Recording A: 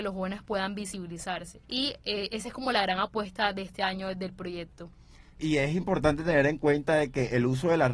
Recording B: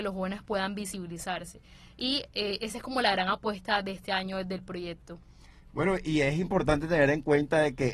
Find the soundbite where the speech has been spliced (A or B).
A